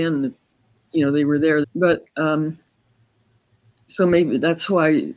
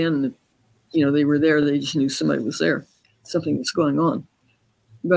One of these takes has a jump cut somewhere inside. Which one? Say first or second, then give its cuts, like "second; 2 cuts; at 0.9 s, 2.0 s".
first; 1 cut; at 1.6 s